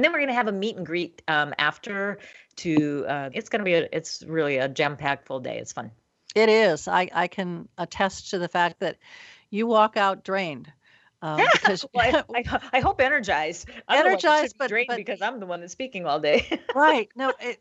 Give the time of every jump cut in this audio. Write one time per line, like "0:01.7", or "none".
0:03.3